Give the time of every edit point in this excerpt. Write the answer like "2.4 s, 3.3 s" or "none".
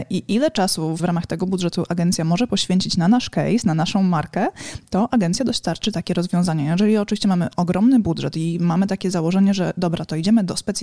1.0 s